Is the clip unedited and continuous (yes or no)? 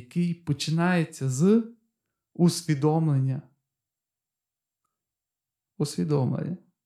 yes